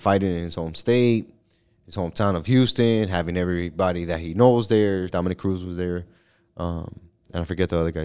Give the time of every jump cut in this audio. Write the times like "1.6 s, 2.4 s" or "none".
5.1 s